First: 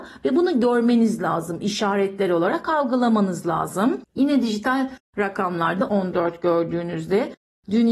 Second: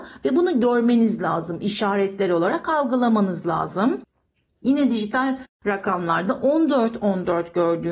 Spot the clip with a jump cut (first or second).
first